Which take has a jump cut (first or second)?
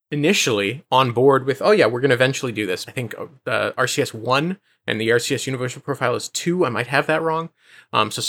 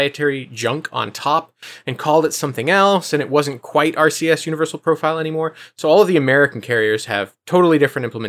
first